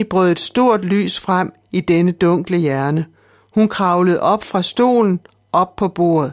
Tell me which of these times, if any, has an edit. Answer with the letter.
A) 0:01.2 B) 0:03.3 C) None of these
C